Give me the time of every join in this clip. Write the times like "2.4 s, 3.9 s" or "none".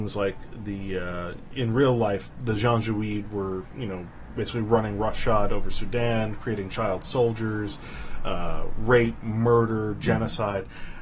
none